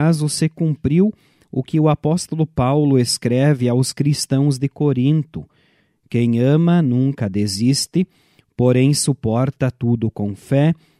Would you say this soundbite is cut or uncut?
uncut